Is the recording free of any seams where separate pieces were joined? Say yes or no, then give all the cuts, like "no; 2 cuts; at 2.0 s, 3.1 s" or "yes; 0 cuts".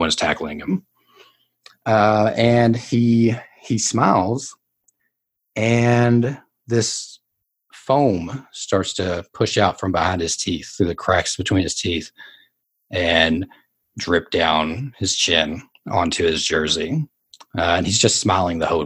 yes; 0 cuts